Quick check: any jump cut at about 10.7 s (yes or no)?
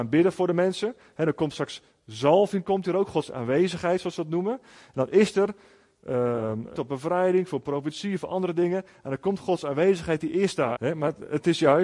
yes